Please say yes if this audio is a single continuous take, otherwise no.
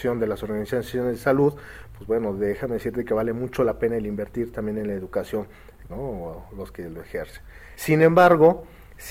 no